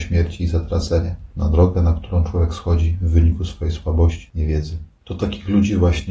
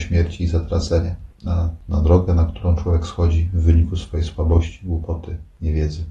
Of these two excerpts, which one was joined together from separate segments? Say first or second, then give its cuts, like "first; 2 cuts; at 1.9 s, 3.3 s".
first; 2 cuts; at 1.3 s, 4.3 s